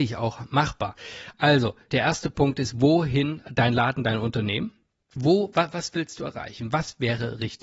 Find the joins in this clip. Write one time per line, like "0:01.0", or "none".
0:01.9
0:05.1